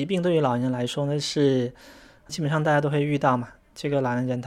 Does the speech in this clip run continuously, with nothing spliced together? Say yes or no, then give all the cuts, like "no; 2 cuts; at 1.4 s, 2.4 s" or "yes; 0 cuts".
yes; 0 cuts